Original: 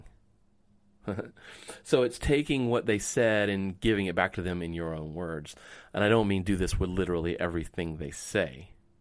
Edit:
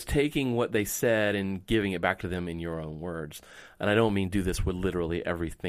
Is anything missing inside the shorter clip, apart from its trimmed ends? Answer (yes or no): no